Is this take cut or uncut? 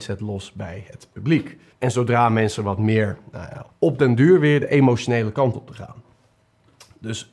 cut